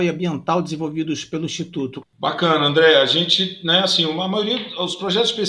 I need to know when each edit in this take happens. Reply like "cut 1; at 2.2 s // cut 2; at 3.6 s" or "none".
cut 1; at 2.0 s